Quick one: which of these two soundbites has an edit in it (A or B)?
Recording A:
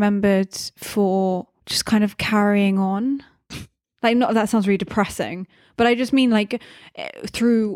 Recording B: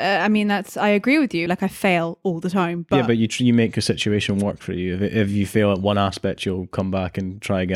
B